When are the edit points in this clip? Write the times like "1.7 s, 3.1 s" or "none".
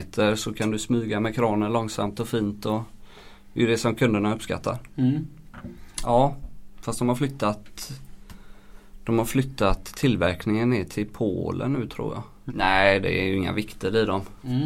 6.0 s, 12.5 s